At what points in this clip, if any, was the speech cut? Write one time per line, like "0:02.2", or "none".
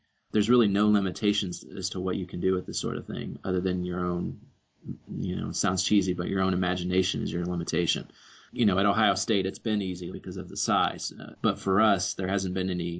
0:10.1
0:11.3